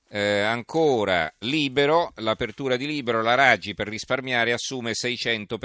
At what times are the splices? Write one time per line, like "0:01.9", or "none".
0:01.4